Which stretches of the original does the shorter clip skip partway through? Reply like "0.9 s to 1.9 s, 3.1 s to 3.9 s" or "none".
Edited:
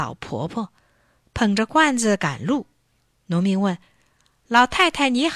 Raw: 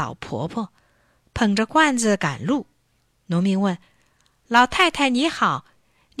none